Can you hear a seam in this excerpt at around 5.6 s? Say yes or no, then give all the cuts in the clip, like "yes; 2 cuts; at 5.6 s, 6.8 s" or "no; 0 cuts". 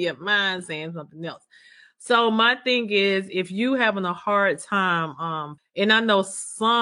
yes; 1 cut; at 5.6 s